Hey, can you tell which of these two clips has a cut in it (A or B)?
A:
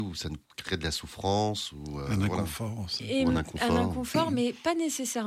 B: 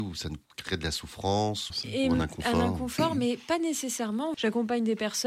B